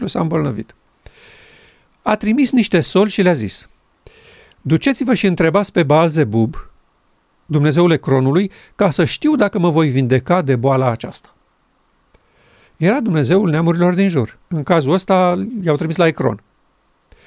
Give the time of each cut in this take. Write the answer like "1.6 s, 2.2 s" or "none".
12.6 s, 14.4 s